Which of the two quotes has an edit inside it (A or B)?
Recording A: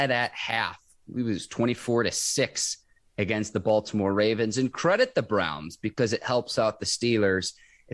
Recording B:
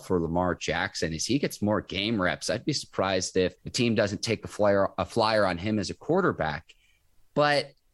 B